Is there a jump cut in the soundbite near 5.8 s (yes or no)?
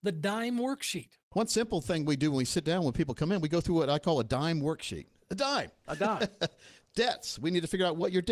no